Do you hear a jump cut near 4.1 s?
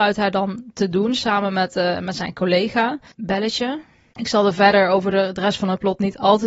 yes; 1 cut; at 4.1 s

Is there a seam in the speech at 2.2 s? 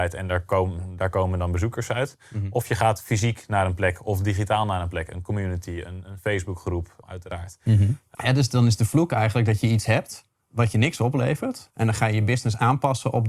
no; 3 cuts; at 7.0 s, 8.1 s, 11.7 s

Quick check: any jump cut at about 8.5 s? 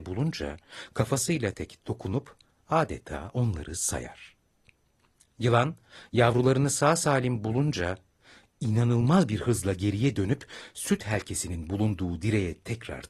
no; 1 cut; at 1.5 s

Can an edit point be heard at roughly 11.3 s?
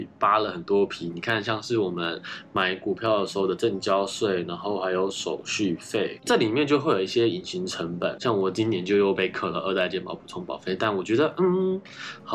no; 0 cuts

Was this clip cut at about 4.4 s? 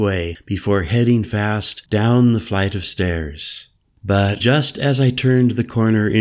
yes; 1 cut; at 4.4 s

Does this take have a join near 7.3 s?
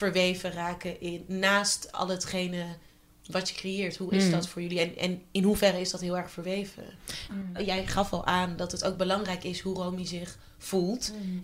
yes; 1 cut; at 7.3 s

